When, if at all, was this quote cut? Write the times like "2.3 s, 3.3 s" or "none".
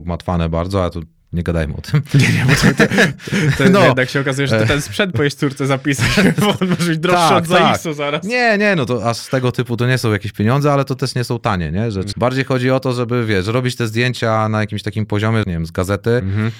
12.1 s, 15.4 s